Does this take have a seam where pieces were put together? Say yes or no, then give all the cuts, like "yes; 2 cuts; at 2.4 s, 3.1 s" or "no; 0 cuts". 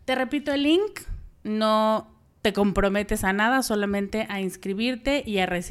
no; 0 cuts